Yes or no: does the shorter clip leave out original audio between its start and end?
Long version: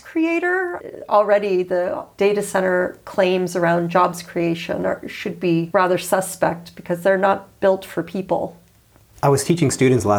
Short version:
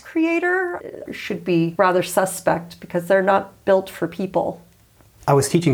yes